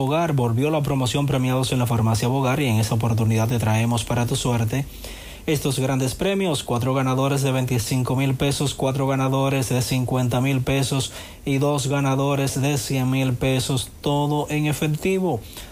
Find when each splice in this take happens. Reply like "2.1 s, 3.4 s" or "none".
none